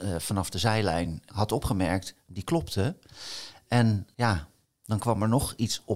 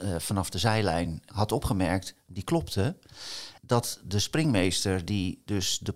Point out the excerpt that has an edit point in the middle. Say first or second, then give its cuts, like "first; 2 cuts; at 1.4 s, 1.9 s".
second; 1 cut; at 3.6 s